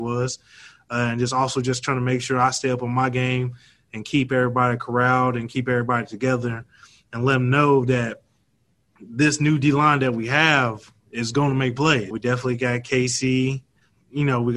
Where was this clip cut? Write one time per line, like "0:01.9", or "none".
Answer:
0:12.1